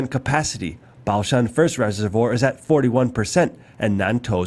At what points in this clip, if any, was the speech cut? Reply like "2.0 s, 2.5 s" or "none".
none